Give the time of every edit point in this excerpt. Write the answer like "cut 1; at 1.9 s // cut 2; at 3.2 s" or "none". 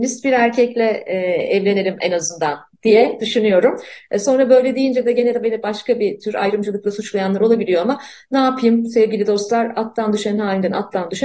none